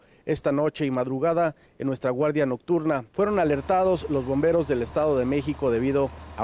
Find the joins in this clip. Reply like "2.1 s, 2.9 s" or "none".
3.1 s